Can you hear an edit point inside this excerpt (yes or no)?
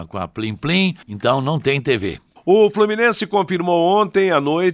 yes